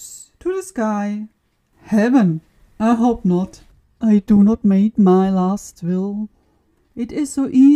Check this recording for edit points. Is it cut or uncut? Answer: uncut